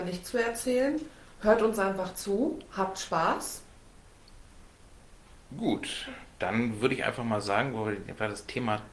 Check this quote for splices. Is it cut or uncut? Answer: uncut